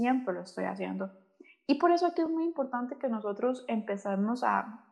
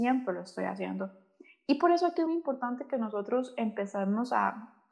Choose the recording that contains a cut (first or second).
second